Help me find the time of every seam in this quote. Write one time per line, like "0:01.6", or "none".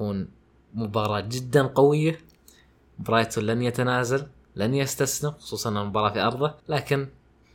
0:06.6